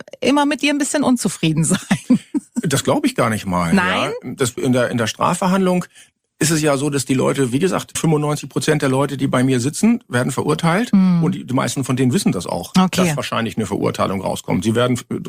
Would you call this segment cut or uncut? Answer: cut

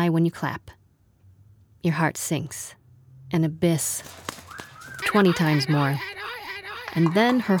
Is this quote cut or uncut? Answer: cut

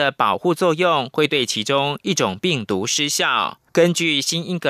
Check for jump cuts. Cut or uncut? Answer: cut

